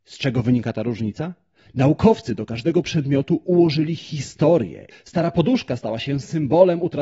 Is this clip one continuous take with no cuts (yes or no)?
no